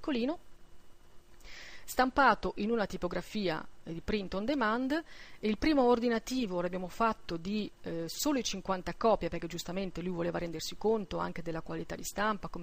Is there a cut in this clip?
no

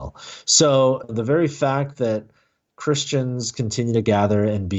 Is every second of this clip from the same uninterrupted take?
no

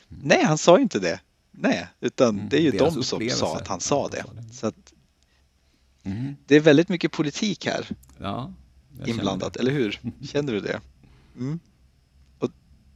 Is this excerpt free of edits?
yes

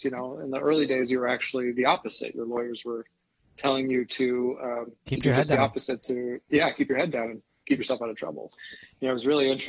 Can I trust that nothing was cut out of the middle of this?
yes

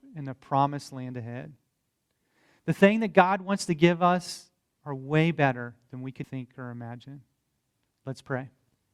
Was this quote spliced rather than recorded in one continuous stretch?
yes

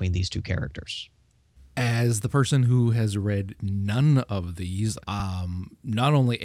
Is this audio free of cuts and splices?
no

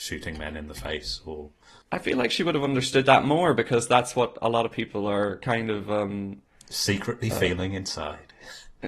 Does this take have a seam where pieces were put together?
no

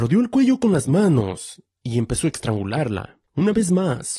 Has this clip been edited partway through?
yes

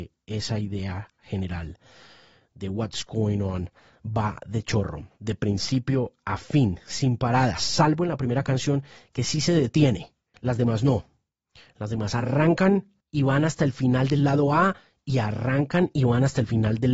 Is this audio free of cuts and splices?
no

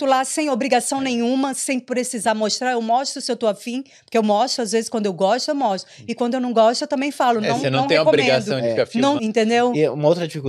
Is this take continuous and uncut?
no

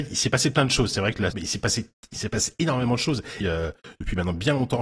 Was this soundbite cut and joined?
yes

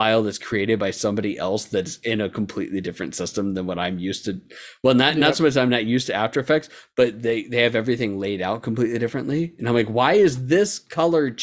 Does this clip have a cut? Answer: no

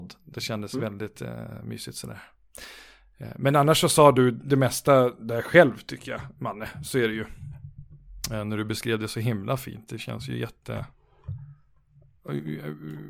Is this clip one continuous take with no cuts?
yes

